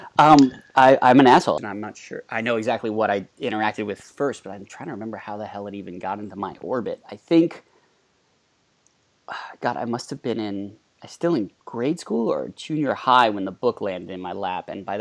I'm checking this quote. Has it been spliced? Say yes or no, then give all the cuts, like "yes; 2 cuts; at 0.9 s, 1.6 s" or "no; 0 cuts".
yes; 2 cuts; at 1.6 s, 11.6 s